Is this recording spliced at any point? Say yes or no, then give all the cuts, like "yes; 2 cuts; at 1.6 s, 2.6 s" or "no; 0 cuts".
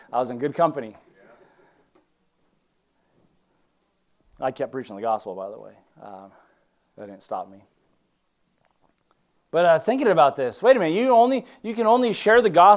no; 0 cuts